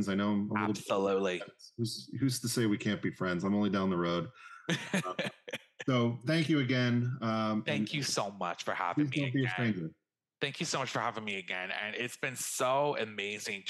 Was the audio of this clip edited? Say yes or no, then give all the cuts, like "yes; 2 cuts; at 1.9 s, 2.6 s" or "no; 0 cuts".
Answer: no; 0 cuts